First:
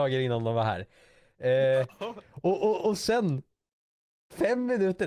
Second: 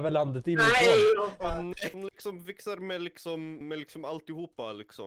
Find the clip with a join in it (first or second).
second